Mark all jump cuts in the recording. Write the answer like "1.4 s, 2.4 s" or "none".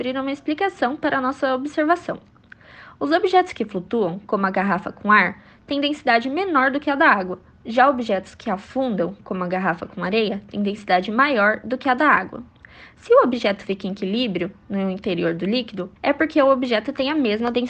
16.0 s